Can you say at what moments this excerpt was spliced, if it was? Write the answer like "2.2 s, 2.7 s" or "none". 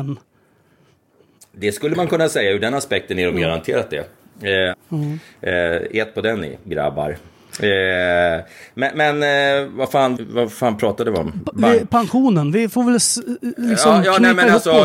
4.7 s, 10.2 s